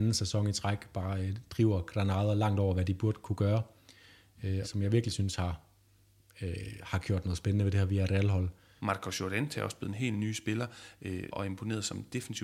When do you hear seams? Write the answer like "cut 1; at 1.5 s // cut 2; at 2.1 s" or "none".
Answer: cut 1; at 4.6 s // cut 2; at 8.8 s // cut 3; at 11.3 s